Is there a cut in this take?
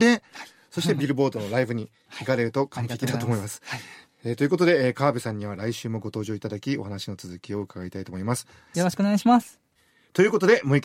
yes; 1 cut; at 8.7 s

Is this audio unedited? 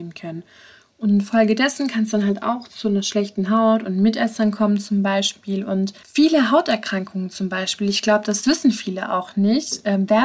yes; 0 cuts

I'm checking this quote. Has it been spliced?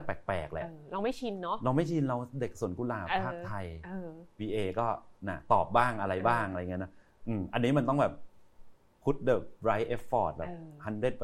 yes; 1 cut; at 4.4 s

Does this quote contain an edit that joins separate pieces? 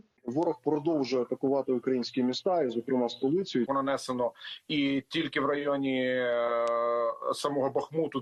yes; 1 cut; at 3.7 s

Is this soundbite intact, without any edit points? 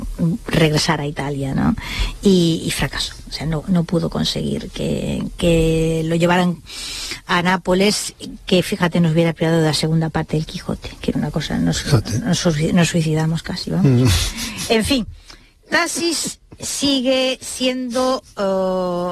no; 1 cut; at 11.1 s

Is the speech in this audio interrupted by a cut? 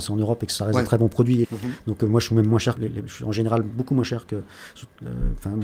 yes; 2 cuts; at 1.4 s, 2.8 s

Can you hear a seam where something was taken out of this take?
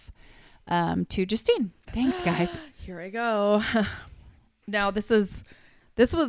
yes; 1 cut; at 1.9 s

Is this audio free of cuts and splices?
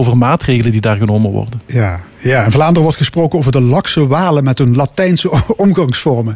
yes; 0 cuts

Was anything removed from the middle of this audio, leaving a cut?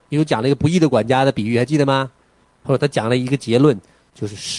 no; 0 cuts

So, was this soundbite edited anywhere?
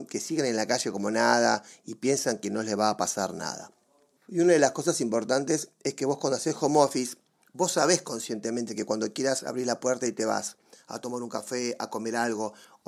yes; 1 cut; at 4.2 s

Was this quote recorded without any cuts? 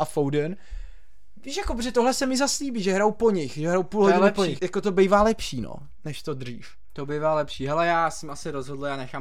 no; 1 cut; at 4.6 s

